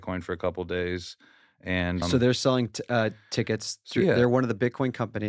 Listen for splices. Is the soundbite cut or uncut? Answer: cut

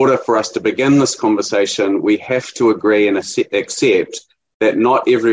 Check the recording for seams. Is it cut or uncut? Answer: uncut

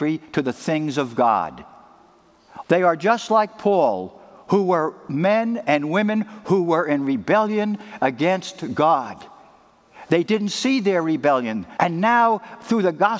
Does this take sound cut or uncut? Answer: cut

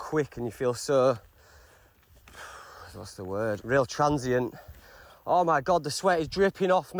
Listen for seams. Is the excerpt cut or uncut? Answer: cut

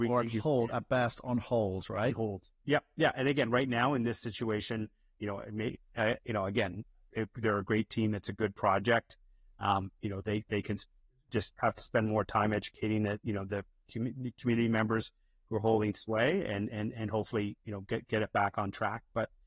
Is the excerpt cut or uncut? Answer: uncut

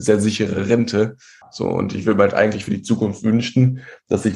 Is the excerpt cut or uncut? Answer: cut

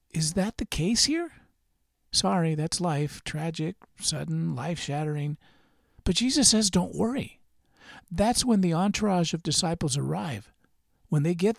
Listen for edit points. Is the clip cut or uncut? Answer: uncut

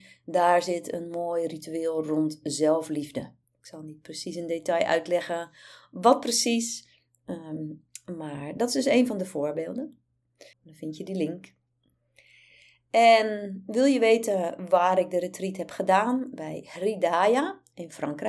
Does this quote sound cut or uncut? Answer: cut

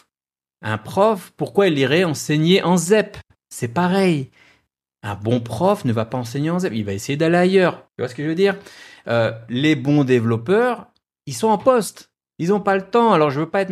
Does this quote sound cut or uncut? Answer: uncut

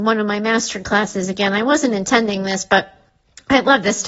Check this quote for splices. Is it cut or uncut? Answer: uncut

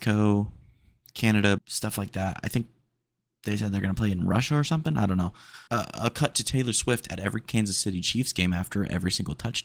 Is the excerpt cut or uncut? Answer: cut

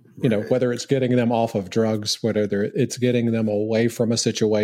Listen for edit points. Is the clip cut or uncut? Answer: uncut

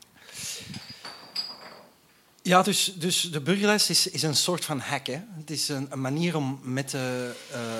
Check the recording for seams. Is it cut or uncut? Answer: uncut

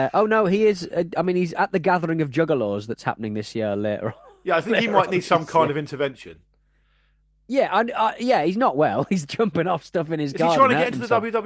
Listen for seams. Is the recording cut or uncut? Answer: uncut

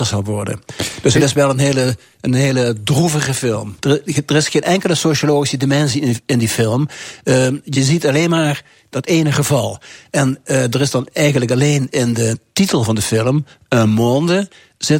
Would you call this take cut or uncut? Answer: cut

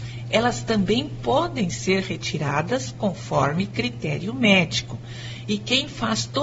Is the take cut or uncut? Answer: uncut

